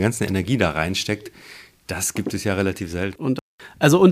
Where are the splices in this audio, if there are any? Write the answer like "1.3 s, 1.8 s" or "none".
3.2 s